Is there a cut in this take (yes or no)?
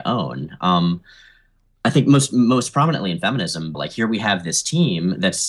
yes